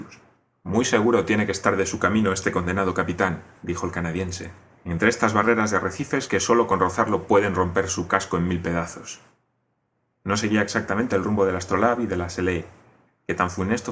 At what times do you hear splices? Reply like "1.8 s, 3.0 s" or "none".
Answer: 4.7 s, 10.1 s